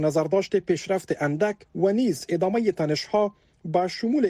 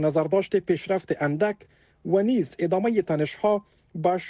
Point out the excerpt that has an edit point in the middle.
first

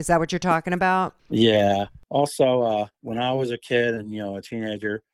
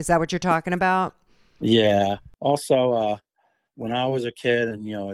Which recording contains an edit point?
first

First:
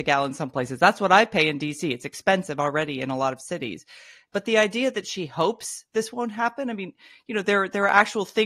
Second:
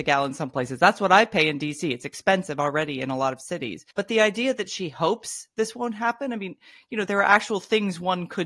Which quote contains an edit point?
second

